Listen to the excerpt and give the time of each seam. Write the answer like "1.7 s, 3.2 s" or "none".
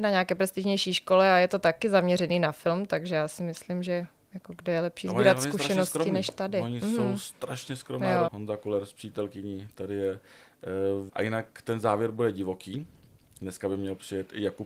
8.3 s, 11.1 s